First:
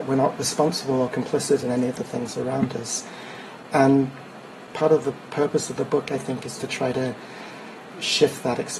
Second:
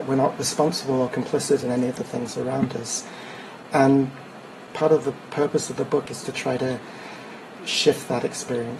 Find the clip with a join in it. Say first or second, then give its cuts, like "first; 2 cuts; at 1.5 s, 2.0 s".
second; 1 cut; at 6.1 s